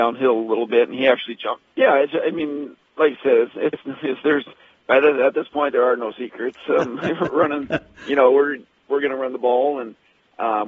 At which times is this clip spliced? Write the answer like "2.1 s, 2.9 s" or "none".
1.7 s